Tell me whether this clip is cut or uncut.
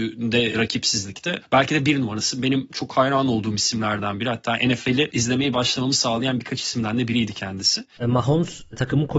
cut